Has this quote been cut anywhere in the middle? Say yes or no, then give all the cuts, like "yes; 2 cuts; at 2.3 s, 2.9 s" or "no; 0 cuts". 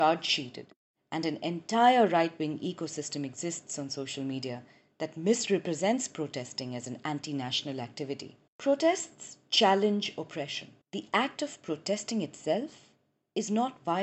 yes; 2 cuts; at 8.5 s, 10.8 s